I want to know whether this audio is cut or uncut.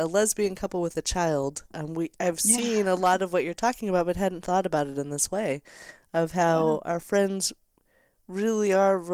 uncut